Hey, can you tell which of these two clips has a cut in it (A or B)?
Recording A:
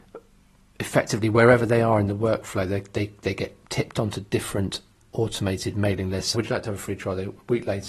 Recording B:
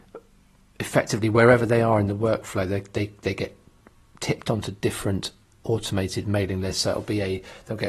A